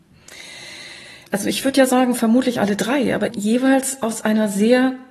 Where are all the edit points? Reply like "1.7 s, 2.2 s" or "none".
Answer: 1.3 s, 3.3 s